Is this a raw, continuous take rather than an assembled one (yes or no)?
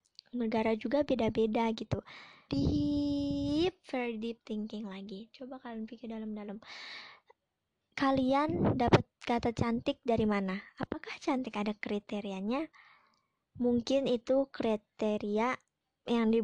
no